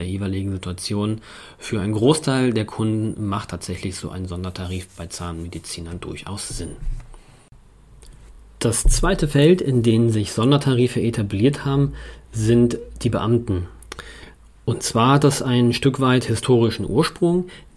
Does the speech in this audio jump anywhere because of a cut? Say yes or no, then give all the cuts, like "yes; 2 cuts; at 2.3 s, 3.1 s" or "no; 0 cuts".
no; 0 cuts